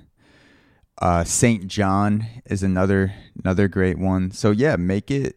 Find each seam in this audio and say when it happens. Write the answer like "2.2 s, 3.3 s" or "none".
none